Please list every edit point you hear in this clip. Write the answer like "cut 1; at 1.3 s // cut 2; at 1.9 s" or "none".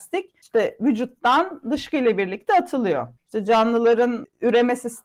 cut 1; at 3.2 s